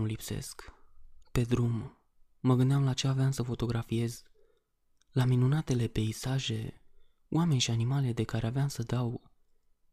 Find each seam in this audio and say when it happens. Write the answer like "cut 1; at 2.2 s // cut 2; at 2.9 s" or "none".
cut 1; at 1.2 s